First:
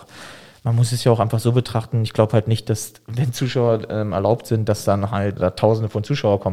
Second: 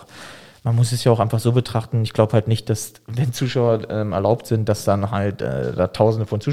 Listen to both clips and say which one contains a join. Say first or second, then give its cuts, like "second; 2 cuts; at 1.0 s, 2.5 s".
first; 1 cut; at 5.4 s